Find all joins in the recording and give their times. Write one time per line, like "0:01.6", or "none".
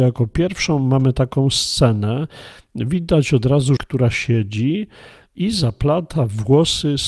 0:03.8